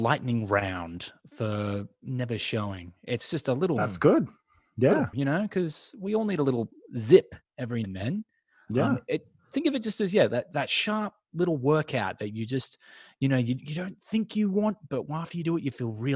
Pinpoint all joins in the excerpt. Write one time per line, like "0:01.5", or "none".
0:05.1
0:07.8